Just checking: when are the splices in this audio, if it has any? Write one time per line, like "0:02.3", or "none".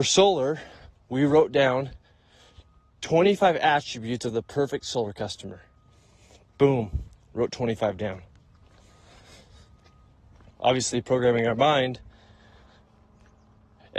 0:10.5

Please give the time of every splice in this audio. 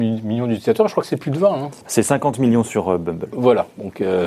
0:01.8

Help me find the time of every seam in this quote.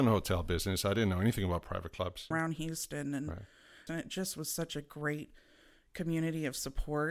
0:02.3
0:03.9

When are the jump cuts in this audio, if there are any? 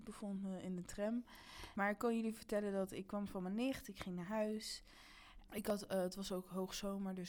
0:01.7
0:05.5

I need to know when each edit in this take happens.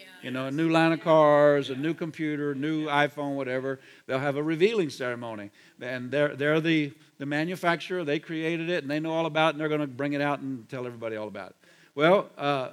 none

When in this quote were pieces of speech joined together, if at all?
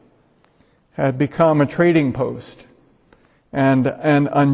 none

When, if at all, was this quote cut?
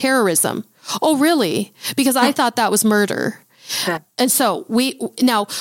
0:04.0

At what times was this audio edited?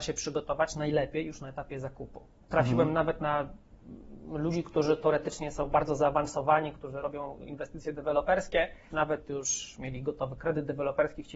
0:08.9

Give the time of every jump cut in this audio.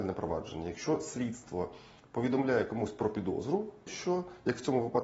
0:03.9

